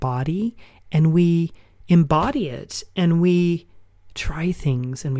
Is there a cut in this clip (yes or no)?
no